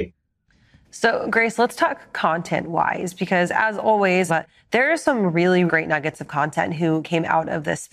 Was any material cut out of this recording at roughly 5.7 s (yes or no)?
yes